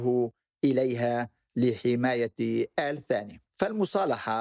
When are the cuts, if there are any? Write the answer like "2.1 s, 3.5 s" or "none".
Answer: 3.5 s